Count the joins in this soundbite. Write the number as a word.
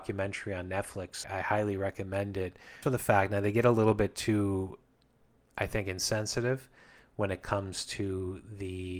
two